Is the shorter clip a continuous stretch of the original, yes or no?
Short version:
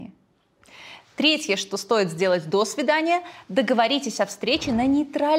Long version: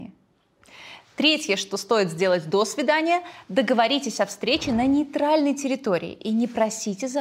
yes